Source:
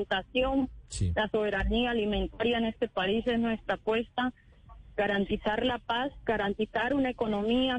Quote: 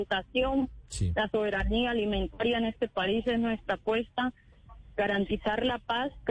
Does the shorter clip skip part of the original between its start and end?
no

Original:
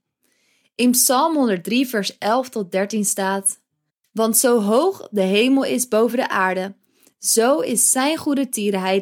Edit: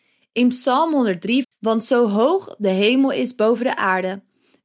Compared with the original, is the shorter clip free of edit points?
no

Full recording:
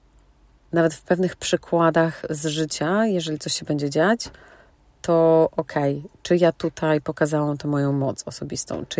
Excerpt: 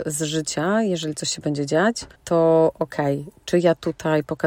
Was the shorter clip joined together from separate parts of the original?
yes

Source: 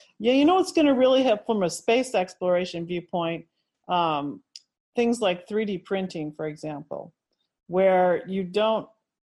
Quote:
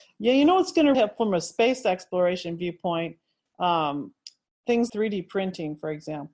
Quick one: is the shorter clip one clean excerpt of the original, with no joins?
no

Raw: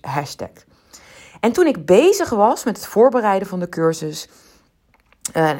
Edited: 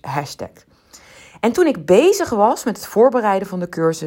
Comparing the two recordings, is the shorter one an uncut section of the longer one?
yes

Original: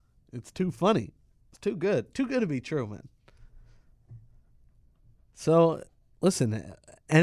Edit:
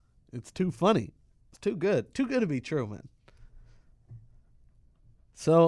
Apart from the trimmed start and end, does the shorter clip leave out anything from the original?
no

